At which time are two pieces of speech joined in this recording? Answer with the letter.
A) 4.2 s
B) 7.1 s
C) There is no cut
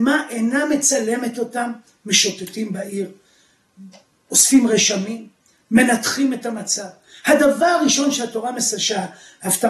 C